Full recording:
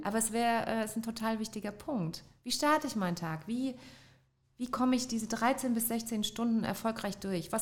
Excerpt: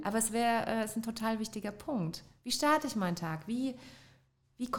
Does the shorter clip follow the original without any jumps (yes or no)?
yes